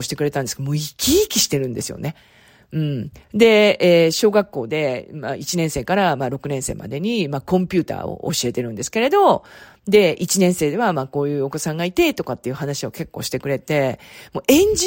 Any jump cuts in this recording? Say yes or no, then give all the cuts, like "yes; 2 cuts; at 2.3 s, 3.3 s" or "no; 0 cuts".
no; 0 cuts